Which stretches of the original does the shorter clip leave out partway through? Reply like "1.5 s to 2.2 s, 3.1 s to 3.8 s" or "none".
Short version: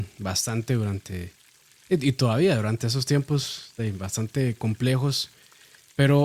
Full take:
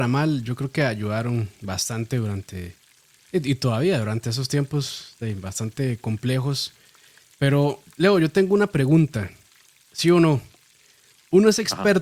none